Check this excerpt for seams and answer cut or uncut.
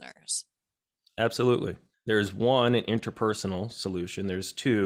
cut